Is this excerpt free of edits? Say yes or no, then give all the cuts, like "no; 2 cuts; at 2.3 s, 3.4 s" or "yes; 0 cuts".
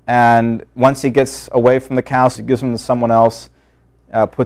no; 1 cut; at 2.4 s